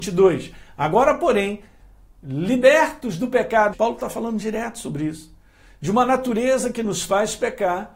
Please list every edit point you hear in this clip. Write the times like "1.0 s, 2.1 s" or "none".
3.7 s